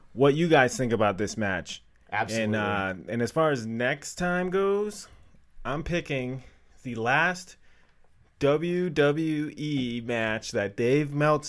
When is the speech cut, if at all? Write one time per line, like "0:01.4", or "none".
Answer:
none